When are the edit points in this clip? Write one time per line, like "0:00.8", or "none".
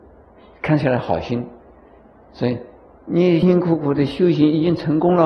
0:03.4